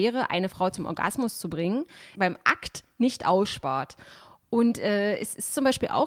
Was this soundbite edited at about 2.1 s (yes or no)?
yes